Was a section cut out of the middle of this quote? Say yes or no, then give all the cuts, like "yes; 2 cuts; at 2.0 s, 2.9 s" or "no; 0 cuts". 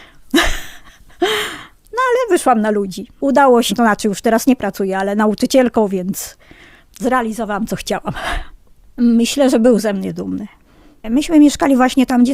yes; 1 cut; at 3.7 s